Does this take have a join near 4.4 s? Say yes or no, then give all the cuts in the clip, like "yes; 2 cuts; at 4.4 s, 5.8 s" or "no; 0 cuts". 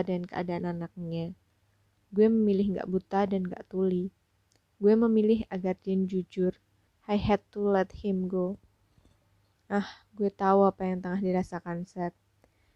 no; 2 cuts; at 6.9 s, 9.5 s